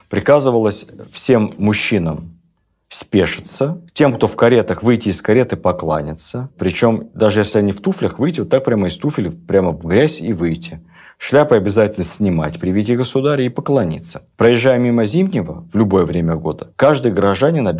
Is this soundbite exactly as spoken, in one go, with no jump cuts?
yes; 0 cuts

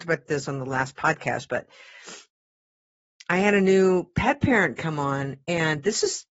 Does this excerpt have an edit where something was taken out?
no; 0 cuts

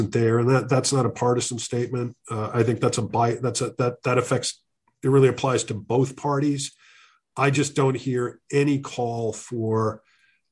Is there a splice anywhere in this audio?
no; 0 cuts

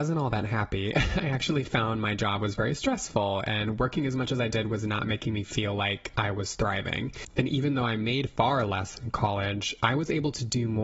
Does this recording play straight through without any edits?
yes; 0 cuts

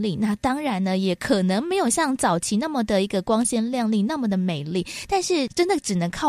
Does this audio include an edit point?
no; 0 cuts

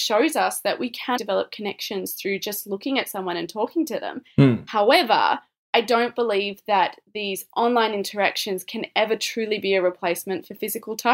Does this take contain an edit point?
yes; 1 cut; at 1.2 s

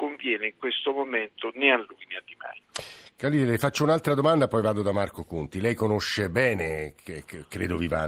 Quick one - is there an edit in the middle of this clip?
no; 0 cuts

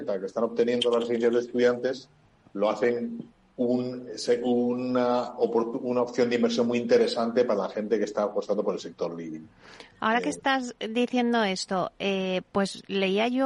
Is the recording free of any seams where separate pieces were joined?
yes; 0 cuts

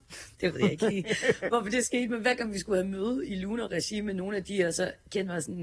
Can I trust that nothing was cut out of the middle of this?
yes; 0 cuts

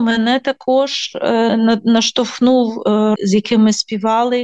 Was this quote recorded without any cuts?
no; 2 cuts; at 1.5 s, 3.2 s

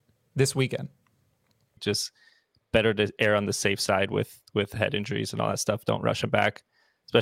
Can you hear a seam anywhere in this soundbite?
yes; 1 cut; at 1.8 s

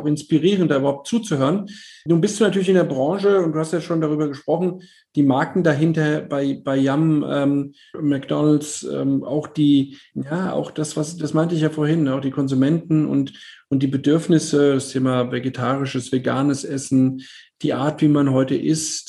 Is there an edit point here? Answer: no; 0 cuts

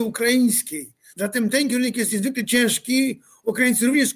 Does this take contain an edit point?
yes; 1 cut; at 1.1 s

